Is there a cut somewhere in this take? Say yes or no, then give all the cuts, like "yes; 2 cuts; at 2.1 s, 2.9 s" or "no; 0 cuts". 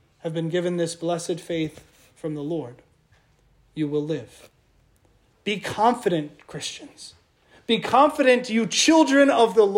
yes; 1 cut; at 5.3 s